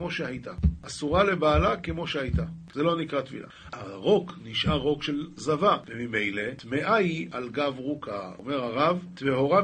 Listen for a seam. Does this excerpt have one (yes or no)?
yes